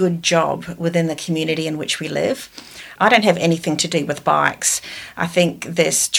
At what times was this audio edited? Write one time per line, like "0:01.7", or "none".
0:03.0

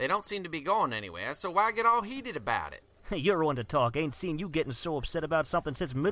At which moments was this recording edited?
none

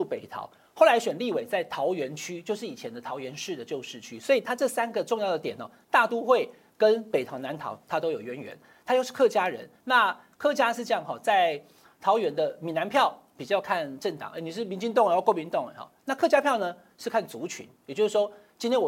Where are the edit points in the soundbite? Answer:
none

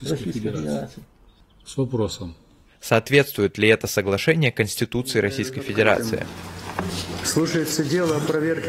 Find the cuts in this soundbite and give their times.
none

